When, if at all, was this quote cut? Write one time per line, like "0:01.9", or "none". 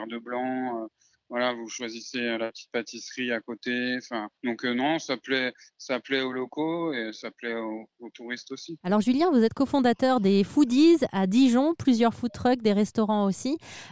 0:04.4